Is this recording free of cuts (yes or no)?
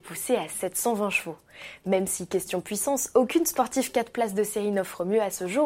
yes